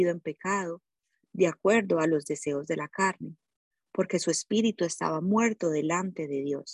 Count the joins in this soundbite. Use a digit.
0